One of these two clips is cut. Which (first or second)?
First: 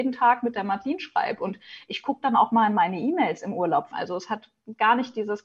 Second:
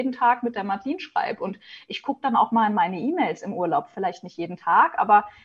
first